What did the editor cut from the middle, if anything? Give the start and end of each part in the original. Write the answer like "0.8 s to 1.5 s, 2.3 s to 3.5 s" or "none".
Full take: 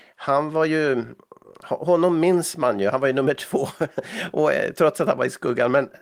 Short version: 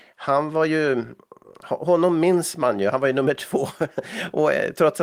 none